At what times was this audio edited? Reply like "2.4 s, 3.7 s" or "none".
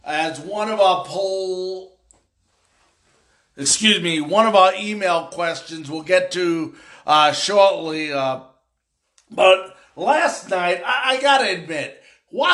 none